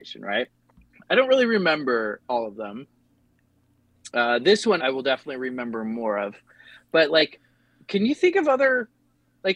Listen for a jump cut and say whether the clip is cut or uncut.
cut